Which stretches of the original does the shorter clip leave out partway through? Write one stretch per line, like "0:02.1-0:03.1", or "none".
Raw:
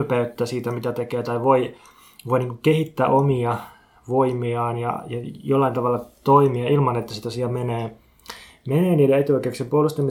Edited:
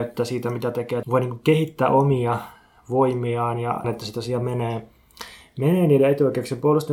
0:01.2-0:02.2
0:05.0-0:06.9